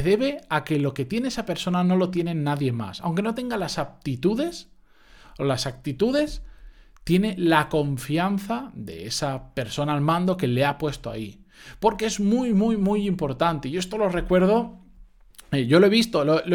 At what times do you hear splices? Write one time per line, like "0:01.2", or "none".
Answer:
none